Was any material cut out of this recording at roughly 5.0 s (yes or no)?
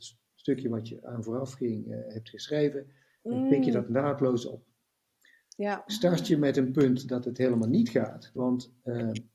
no